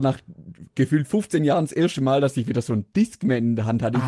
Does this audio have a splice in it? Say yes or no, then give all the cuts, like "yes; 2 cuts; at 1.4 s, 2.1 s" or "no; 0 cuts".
no; 0 cuts